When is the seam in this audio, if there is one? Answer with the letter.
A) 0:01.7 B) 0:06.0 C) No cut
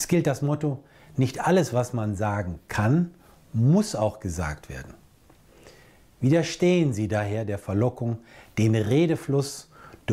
C